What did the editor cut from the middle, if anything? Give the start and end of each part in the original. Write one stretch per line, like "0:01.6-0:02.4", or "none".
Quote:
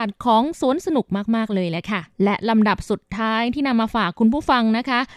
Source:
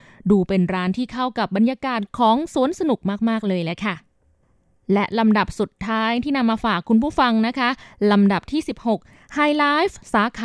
0:04.1-0:04.8